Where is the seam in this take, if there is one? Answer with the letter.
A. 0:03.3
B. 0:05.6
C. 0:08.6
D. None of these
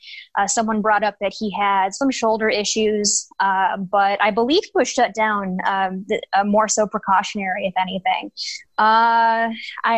C